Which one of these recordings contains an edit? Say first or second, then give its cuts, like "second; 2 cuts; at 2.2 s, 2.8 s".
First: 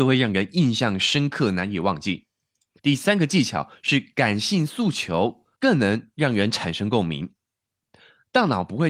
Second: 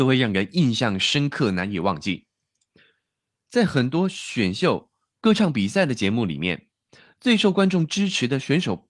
first; 2 cuts; at 2.8 s, 5.5 s